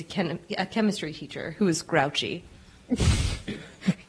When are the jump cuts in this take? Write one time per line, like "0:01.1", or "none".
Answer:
none